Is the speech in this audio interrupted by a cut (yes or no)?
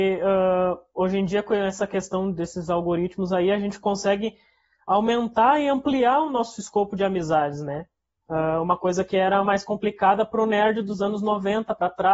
no